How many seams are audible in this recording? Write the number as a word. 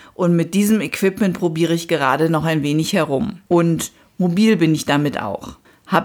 one